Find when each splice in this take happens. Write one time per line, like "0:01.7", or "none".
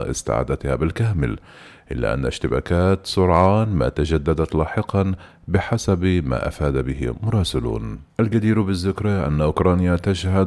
0:08.1